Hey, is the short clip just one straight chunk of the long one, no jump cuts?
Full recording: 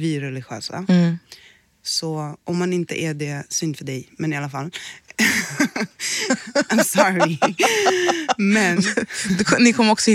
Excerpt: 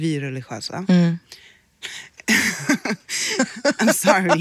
no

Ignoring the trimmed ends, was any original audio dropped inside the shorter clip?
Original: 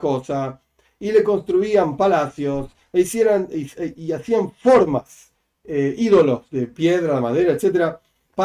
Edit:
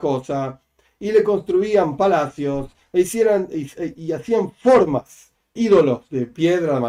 yes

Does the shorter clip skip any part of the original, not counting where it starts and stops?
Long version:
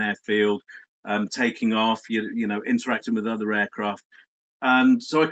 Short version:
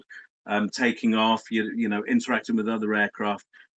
no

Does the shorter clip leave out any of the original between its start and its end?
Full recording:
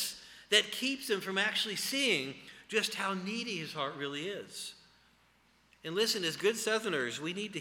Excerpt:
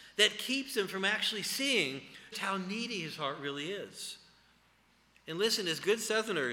yes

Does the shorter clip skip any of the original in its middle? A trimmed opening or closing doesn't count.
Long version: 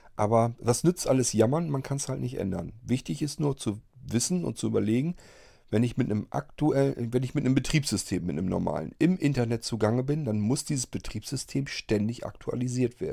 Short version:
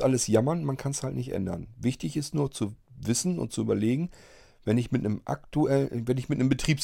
no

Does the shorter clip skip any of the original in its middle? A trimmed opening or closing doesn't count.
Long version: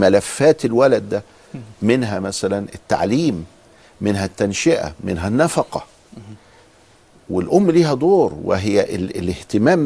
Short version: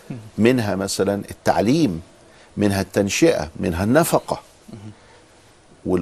no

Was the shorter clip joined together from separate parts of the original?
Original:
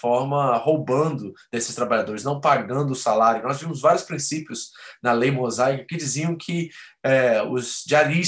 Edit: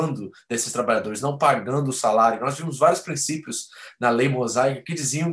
no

